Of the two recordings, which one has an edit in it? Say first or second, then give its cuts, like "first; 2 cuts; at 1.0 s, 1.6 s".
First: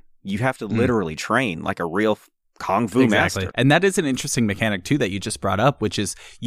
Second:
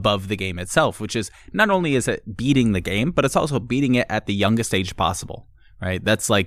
first; 1 cut; at 3.5 s